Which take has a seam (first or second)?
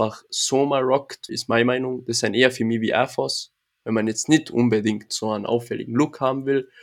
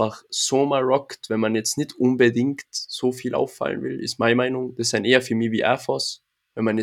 first